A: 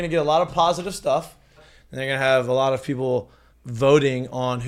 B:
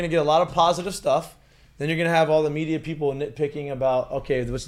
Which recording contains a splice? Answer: A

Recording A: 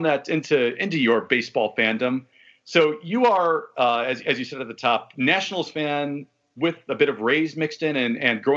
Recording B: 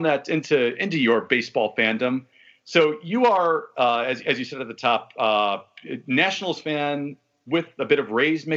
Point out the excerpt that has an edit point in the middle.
A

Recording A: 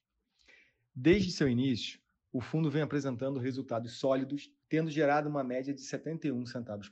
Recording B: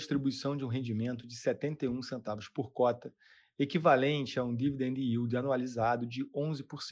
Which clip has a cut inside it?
A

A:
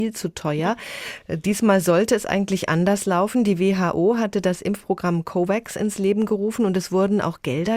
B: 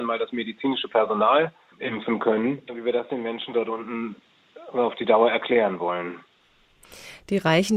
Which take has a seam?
B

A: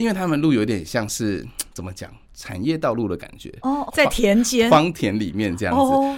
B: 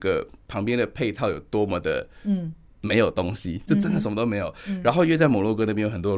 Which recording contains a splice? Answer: A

